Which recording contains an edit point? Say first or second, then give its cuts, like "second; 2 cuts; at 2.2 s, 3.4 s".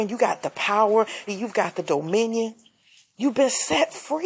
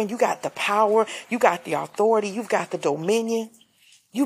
first; 1 cut; at 1.3 s